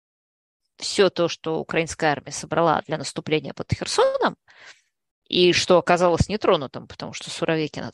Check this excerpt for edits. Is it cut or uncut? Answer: uncut